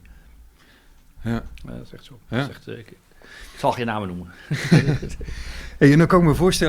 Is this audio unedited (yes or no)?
no